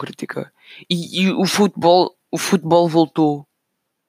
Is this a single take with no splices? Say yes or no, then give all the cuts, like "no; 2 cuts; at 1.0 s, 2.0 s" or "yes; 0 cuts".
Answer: yes; 0 cuts